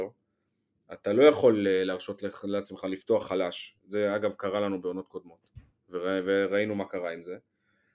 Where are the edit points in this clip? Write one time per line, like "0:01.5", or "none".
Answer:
none